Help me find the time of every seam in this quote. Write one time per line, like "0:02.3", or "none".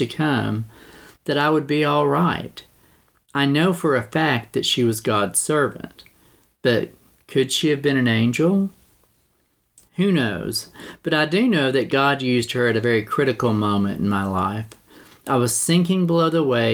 none